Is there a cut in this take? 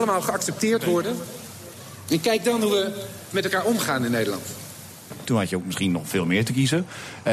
yes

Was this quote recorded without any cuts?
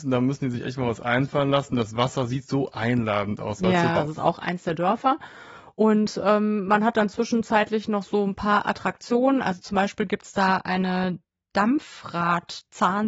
no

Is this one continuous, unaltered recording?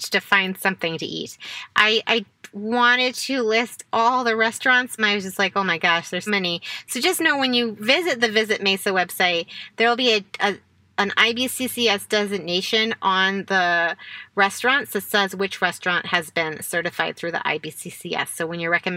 no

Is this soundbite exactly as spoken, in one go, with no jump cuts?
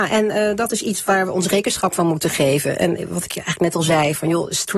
yes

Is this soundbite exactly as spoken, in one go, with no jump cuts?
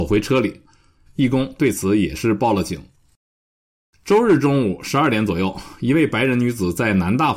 no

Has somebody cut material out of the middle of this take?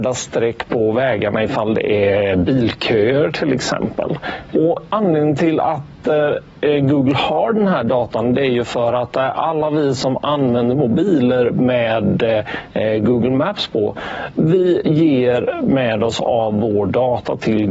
yes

